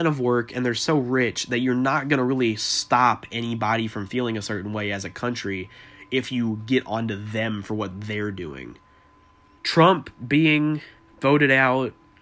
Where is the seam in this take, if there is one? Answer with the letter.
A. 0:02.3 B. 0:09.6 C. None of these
B